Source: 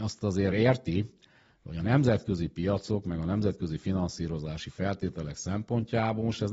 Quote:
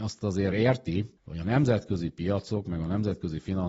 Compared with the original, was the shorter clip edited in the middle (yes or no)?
yes